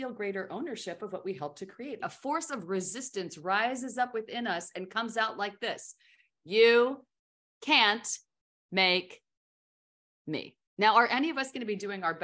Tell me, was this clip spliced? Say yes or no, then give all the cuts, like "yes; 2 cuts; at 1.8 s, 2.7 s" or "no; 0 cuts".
yes; 2 cuts; at 2.0 s, 10.7 s